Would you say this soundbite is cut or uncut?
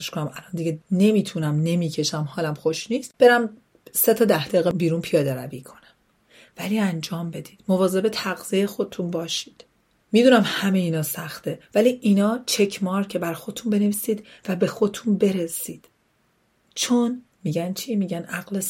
uncut